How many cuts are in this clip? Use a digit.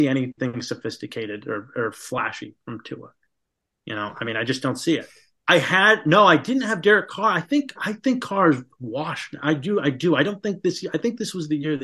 2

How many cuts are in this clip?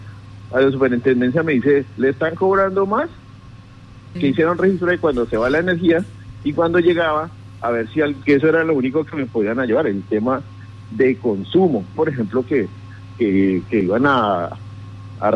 3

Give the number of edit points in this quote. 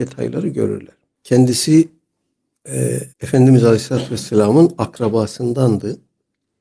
2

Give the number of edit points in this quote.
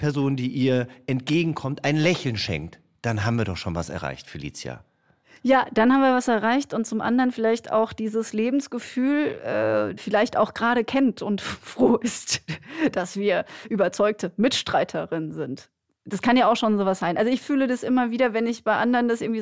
1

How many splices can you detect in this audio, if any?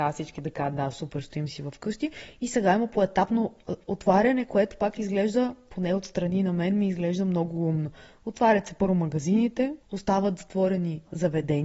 0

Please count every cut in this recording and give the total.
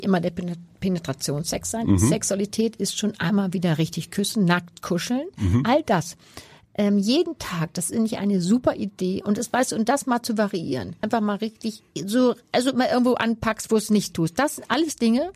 1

